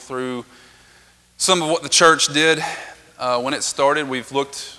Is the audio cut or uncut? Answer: uncut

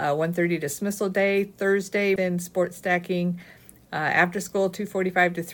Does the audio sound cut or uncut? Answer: cut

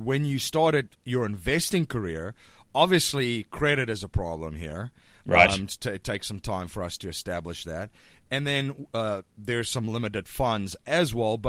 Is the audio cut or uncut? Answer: uncut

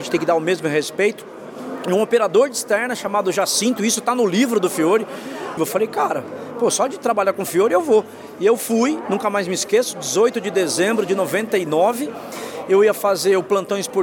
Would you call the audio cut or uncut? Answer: cut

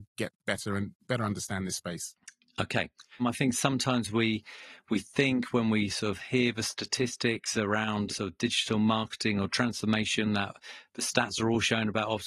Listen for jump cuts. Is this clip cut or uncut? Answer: cut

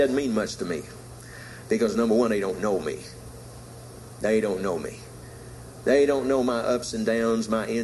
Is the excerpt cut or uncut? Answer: uncut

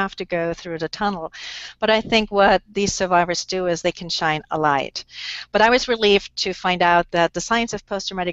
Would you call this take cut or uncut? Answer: uncut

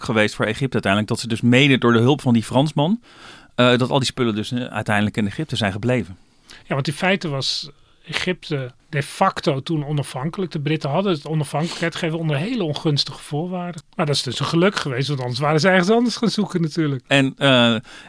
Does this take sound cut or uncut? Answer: cut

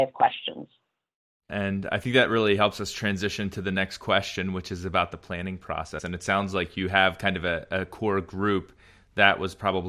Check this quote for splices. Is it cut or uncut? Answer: cut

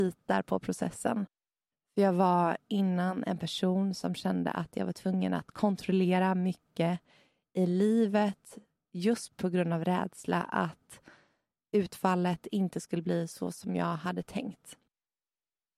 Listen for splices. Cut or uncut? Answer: cut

